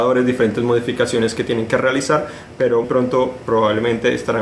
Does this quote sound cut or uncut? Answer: cut